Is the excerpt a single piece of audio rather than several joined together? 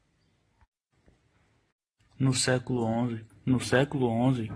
no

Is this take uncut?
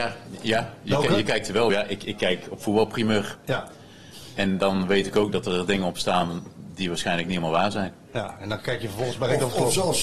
yes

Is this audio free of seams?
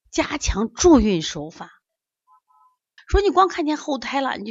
no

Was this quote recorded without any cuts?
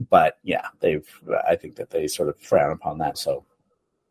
no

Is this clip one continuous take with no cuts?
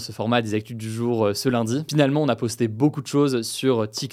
no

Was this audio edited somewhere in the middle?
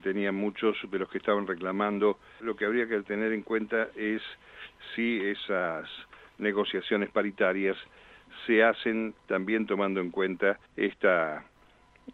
yes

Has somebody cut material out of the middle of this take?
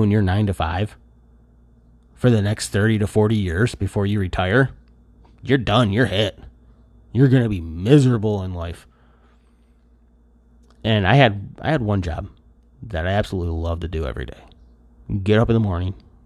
no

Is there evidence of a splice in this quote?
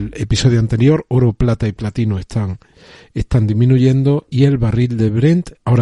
no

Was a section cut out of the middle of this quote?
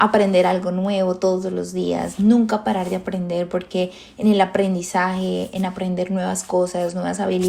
no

